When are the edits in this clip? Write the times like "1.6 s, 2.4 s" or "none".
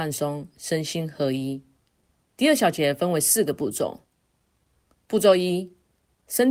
none